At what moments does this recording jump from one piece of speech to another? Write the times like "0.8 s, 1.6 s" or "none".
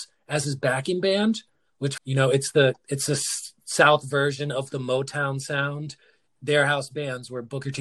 2.0 s